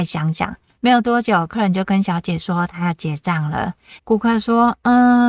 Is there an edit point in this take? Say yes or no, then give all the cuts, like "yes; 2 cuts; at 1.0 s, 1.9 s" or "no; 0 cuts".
yes; 1 cut; at 4.0 s